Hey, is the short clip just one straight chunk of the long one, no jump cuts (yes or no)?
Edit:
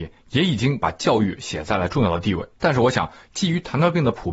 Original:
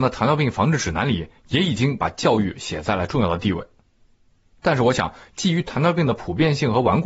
no